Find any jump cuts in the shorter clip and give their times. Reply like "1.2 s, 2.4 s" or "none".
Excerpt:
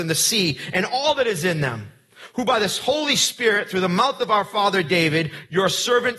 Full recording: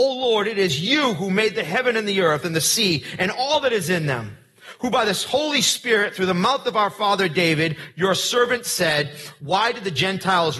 none